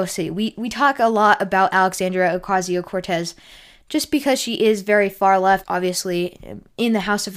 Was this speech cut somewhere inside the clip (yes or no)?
yes